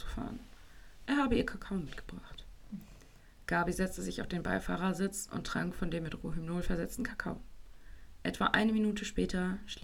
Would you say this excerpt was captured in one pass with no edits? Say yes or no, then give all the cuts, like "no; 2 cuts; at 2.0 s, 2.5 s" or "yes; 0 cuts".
no; 1 cut; at 1.1 s